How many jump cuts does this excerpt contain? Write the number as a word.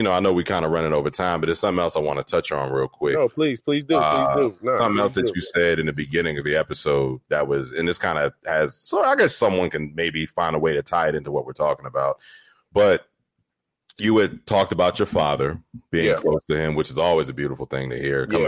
zero